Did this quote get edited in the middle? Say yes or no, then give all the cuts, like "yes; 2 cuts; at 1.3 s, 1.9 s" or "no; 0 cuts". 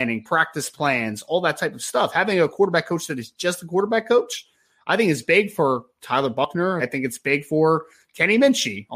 yes; 1 cut; at 6.8 s